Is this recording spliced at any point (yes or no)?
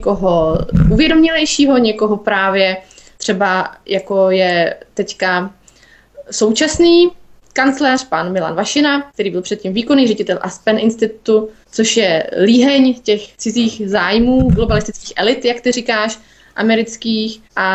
no